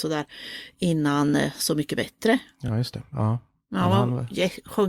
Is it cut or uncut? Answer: uncut